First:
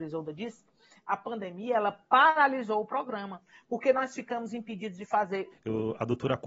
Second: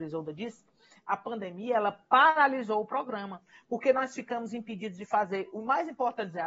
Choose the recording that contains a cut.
first; 1 cut; at 5.5 s

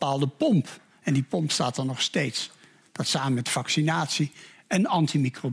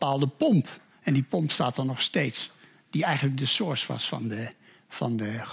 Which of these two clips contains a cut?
first; 1 cut; at 2.8 s

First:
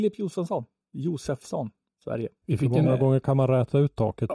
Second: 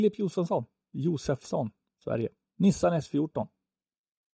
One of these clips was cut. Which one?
first; 1 cut; at 2.4 s

